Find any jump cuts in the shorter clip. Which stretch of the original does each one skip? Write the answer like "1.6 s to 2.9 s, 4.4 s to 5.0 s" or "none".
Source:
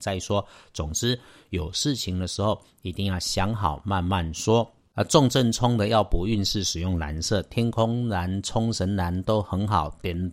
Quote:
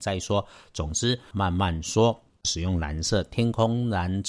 1.3 s to 3.8 s, 5.0 s to 6.6 s